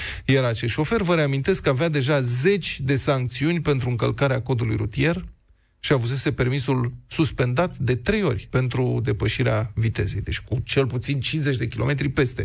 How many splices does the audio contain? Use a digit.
1